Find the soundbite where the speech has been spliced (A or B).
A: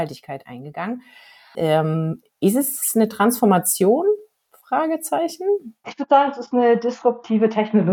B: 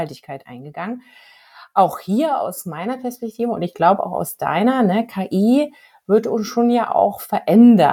A